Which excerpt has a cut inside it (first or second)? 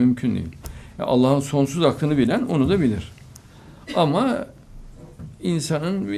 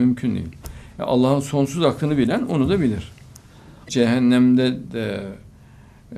second